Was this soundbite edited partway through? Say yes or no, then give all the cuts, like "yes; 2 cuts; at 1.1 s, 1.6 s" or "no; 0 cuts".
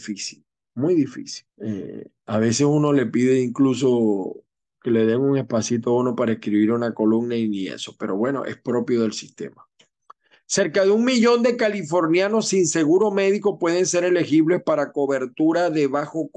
yes; 1 cut; at 1.5 s